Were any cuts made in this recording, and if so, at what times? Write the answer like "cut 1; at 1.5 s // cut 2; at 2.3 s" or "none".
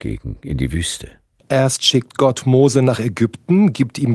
cut 1; at 1.4 s